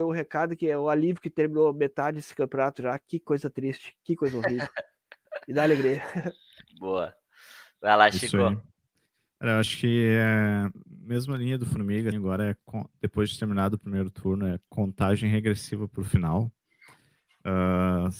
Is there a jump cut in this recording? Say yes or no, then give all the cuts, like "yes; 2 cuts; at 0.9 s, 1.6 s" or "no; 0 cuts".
yes; 1 cut; at 12.1 s